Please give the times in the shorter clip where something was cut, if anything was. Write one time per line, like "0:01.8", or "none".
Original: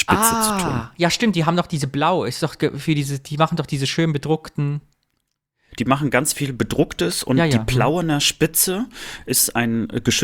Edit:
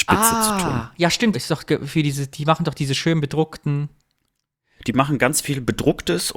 0:01.3

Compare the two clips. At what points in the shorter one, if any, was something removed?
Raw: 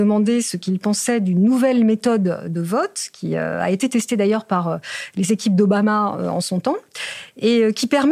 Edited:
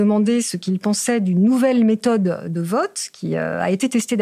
none

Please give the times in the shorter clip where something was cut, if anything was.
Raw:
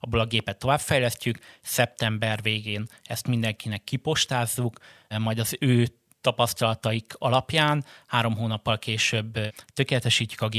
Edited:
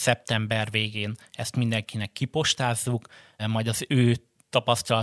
none

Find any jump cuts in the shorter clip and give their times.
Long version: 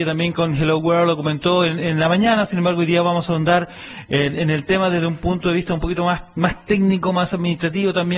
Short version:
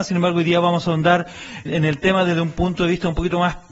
0:01.7

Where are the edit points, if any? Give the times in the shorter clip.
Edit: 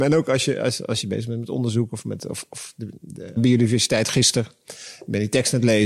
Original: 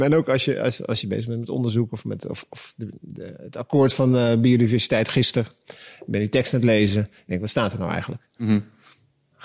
0:03.4

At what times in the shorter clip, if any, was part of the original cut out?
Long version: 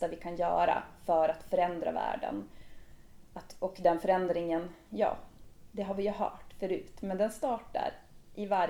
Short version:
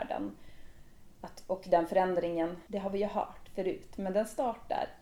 0:02.7

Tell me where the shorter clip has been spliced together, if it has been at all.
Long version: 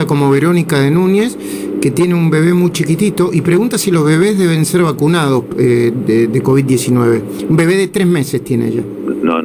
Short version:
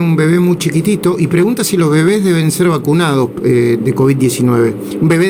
0:03.8

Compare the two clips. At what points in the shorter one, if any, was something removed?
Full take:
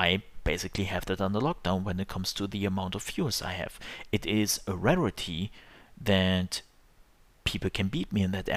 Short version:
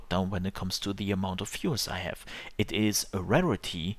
none

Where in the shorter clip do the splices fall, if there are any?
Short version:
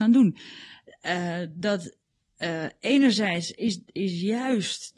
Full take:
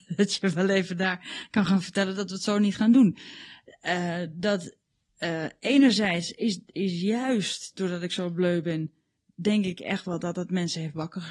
none

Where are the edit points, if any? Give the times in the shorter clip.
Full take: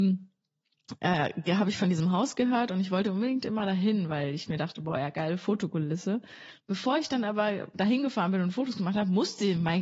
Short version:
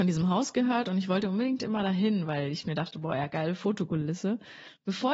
none

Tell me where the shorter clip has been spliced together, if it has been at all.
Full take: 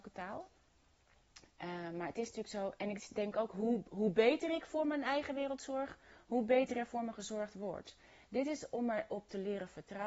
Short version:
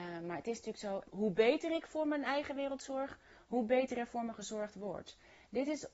0:01.0

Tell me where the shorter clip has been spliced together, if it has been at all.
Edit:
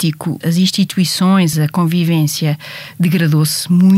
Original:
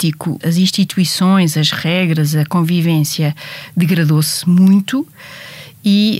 0:01.5

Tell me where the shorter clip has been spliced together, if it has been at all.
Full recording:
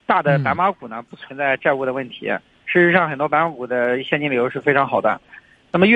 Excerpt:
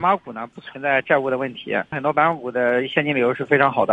0:01.9

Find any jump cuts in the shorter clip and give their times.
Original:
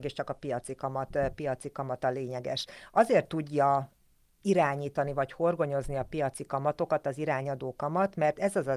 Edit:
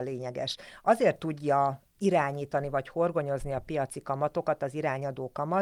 0:01.9

